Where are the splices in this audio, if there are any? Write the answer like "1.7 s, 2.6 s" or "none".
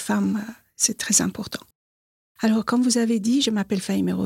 none